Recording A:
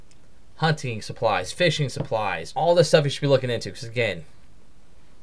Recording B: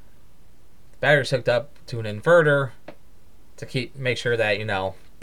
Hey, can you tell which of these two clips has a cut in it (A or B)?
A